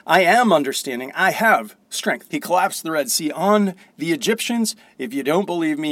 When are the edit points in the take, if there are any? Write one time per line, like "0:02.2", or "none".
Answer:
0:02.3